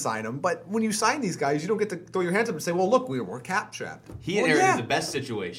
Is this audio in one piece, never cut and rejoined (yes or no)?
yes